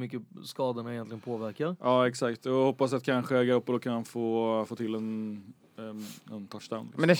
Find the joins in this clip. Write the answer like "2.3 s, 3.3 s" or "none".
none

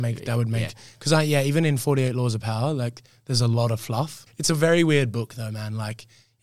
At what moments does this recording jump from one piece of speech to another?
4.3 s

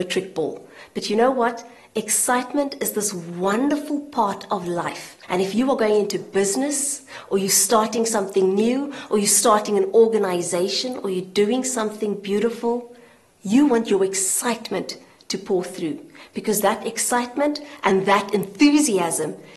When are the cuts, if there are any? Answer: 5.2 s

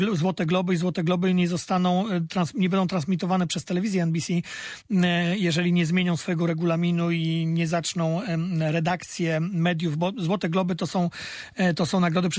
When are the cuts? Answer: none

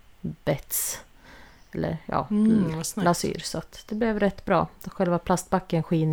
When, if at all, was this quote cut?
none

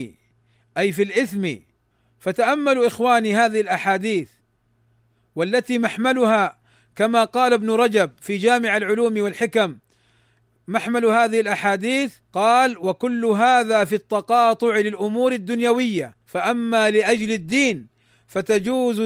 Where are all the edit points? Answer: 12.2 s, 16.2 s

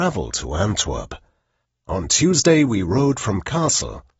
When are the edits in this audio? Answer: 1.8 s

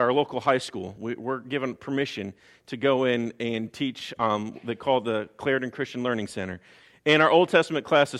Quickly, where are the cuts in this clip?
none

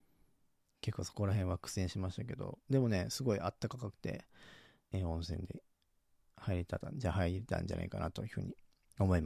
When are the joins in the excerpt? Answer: 4.8 s

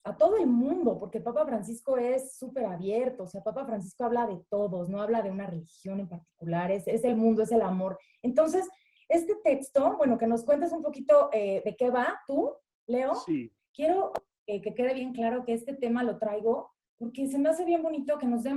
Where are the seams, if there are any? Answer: 13.6 s, 16.8 s

